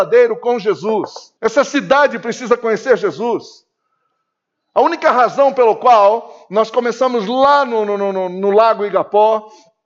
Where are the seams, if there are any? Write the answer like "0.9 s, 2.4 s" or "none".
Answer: 1.4 s